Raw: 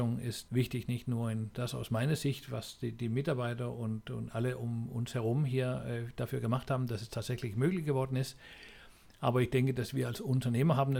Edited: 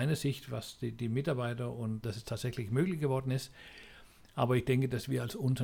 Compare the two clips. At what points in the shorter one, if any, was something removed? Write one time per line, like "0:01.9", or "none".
0:02.0